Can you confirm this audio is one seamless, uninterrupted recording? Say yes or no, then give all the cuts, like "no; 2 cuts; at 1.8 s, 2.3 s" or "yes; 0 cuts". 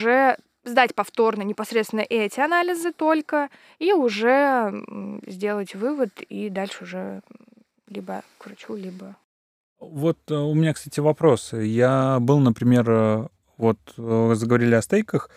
yes; 0 cuts